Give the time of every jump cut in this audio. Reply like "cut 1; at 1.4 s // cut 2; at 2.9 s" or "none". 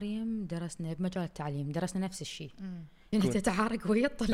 cut 1; at 3.1 s